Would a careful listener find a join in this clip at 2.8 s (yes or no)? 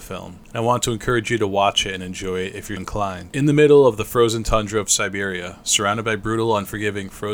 yes